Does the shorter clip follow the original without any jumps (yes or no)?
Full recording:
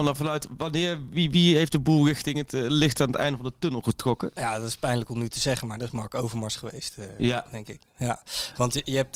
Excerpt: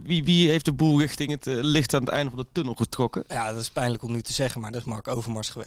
yes